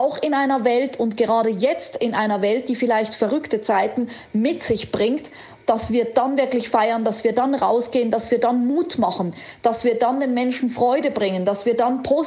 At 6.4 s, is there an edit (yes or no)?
no